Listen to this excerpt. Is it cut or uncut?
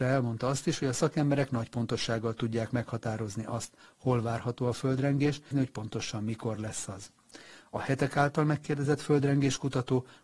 cut